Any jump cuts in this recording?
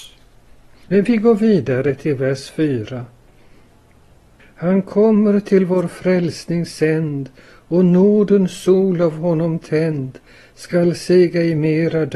no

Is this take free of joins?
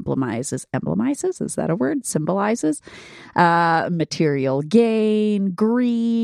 yes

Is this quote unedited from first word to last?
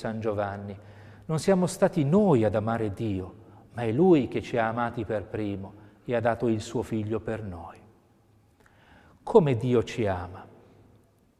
yes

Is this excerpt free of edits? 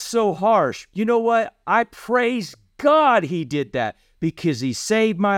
yes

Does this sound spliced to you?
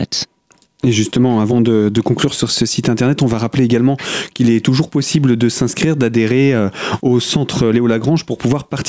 no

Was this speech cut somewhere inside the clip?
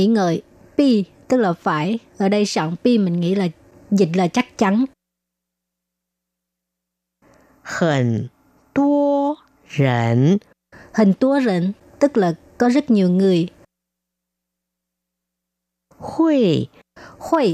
no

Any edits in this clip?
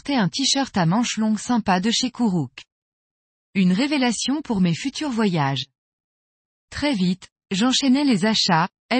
yes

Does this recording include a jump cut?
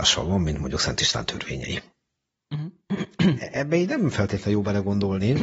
no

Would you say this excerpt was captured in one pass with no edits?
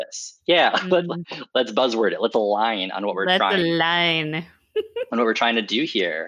yes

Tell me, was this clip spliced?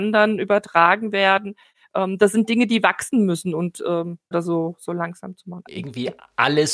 yes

